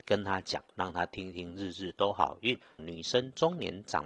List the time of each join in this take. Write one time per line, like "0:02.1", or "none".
0:02.8

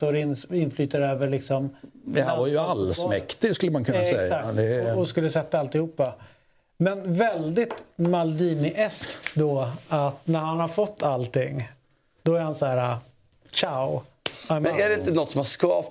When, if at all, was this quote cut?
none

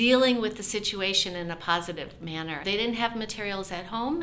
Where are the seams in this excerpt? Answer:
0:02.6

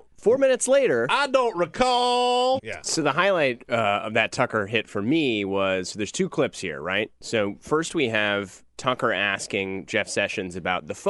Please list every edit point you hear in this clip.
0:02.6

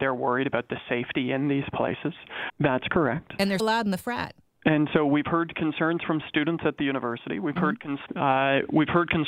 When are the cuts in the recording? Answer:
0:02.5
0:03.6
0:08.1

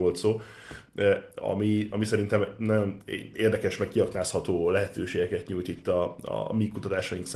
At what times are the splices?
none

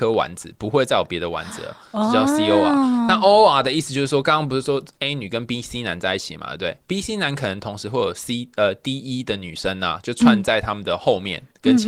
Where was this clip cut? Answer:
none

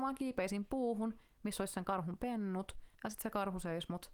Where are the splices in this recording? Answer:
0:02.9

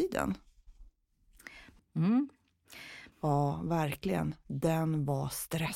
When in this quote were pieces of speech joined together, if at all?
0:01.8
0:03.1

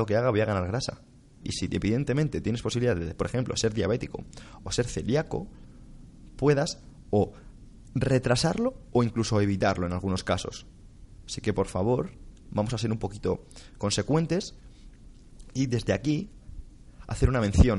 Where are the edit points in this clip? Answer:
0:01.4

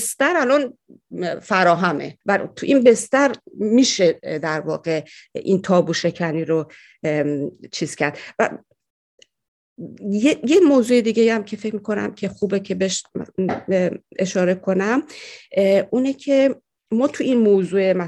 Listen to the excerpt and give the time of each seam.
0:02.2

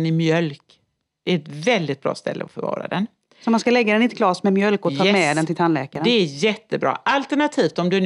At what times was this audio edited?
none

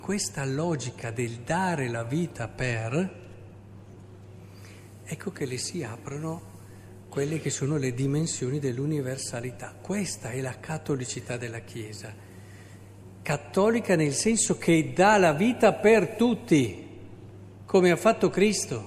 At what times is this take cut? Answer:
none

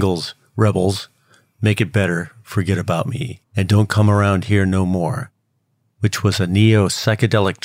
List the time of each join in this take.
0:03.5

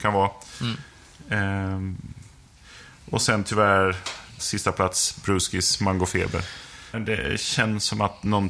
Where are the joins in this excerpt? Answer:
0:06.9

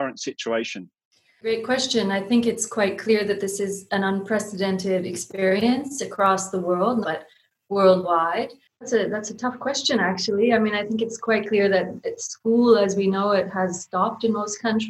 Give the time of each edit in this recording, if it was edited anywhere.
0:07.0
0:08.7

